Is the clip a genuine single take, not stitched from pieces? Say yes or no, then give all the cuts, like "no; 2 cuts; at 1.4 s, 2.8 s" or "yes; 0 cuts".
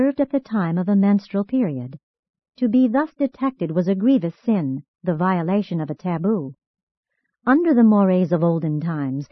yes; 0 cuts